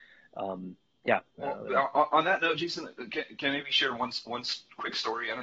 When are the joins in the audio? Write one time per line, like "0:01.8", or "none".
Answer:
0:01.3